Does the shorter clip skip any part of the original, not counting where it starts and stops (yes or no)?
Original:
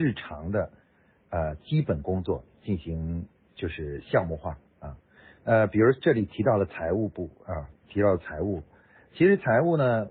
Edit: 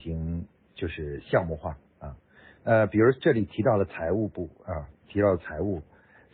no